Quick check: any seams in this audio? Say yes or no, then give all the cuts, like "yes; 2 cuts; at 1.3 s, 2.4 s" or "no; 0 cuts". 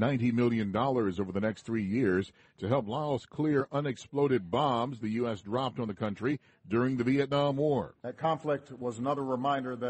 no; 0 cuts